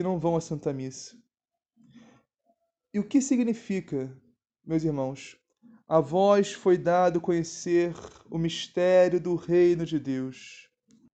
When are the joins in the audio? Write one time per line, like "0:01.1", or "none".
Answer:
none